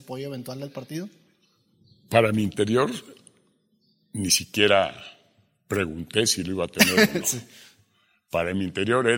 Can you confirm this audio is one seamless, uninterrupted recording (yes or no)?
yes